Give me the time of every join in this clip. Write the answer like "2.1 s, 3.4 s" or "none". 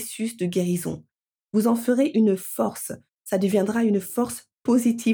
none